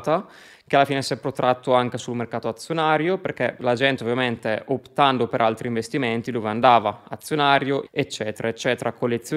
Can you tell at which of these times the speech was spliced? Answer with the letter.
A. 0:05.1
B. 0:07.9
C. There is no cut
B